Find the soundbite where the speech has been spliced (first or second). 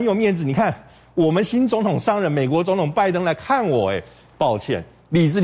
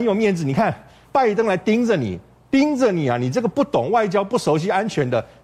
second